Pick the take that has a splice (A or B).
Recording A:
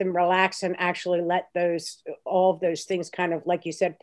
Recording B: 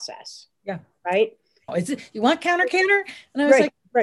B